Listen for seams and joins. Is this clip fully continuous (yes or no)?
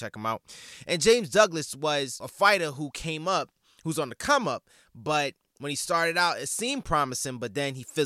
yes